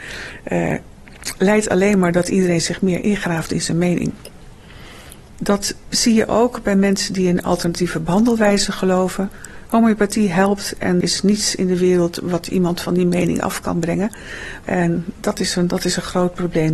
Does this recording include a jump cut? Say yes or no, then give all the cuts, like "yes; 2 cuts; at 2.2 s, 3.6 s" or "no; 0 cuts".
yes; 3 cuts; at 5.4 s, 11.0 s, 14.6 s